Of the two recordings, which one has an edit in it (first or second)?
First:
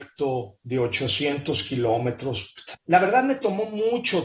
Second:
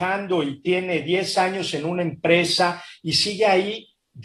first